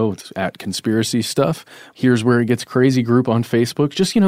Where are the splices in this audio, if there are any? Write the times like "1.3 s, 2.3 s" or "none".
1.9 s